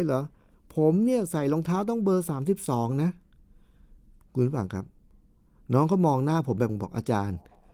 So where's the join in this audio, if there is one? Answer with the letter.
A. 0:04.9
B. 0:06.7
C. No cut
B